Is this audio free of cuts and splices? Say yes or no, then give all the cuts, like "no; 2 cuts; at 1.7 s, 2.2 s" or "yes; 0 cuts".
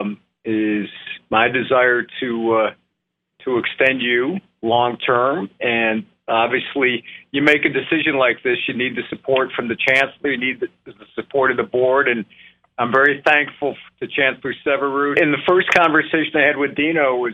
no; 1 cut; at 15.1 s